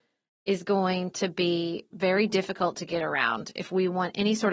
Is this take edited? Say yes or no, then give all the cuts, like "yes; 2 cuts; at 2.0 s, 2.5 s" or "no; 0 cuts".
no; 0 cuts